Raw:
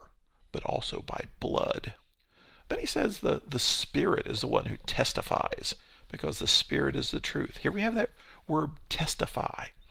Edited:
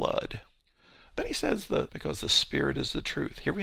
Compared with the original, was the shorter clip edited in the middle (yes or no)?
yes